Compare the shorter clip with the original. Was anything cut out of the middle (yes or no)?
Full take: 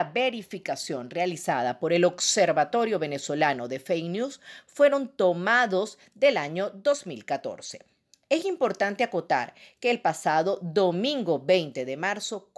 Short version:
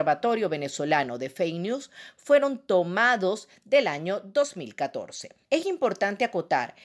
yes